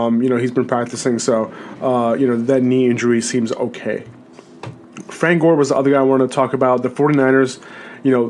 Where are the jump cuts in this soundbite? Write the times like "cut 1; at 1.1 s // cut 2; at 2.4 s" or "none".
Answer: none